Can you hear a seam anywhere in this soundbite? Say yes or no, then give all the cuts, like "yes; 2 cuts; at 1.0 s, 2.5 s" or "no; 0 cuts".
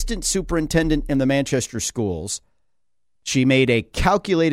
yes; 1 cut; at 3.2 s